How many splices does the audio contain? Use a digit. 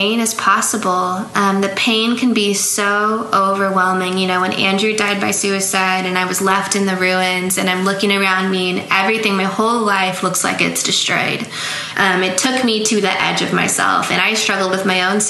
1